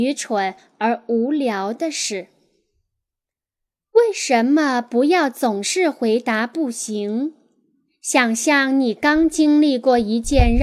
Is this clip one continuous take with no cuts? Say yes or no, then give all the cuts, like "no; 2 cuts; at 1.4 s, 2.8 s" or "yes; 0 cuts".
yes; 0 cuts